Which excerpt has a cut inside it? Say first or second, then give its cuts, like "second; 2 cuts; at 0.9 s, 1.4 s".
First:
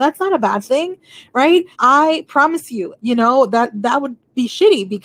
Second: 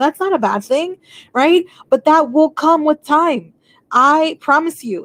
first; 2 cuts; at 1.7 s, 3.0 s